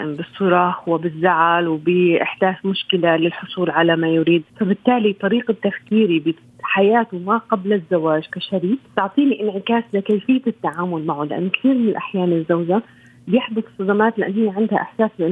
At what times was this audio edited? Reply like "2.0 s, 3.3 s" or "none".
4.5 s, 8.9 s

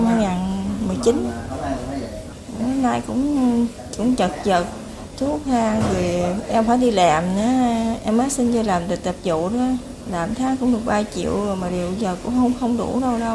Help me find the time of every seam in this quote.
2.6 s

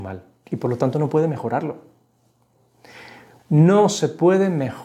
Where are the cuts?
3.4 s

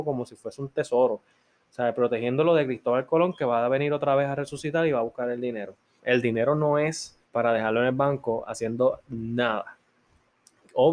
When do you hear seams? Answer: 6.0 s, 7.2 s

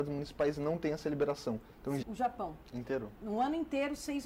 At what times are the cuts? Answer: 2.0 s, 3.2 s

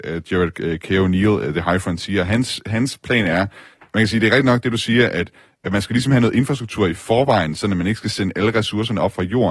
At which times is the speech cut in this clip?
none

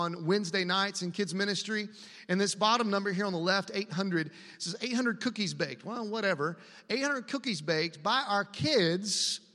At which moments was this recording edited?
none

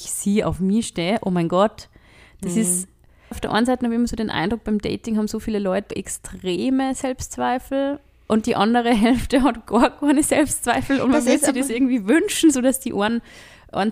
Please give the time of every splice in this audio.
3.3 s, 5.9 s

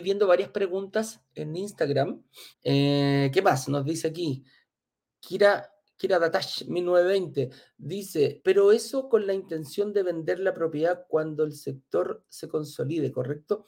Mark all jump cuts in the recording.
2.5 s, 8.4 s

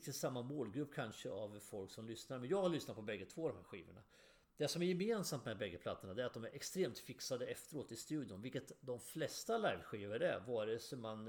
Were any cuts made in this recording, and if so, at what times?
none

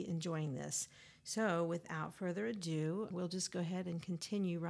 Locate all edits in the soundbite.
3.1 s

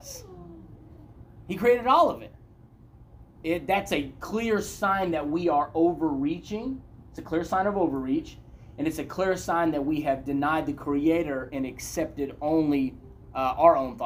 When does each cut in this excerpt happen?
3.4 s

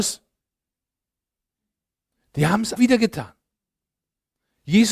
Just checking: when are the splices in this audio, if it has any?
2.8 s

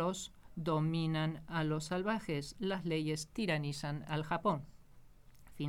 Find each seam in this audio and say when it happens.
2.5 s

